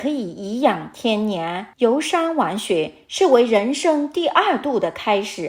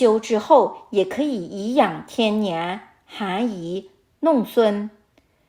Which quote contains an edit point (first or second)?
first